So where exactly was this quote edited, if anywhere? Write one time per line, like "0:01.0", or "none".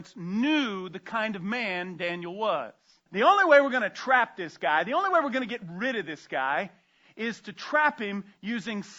0:03.1